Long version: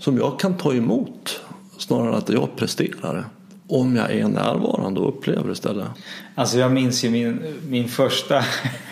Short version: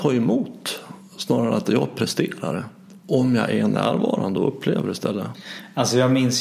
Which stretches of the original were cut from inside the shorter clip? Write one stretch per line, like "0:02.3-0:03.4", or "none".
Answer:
none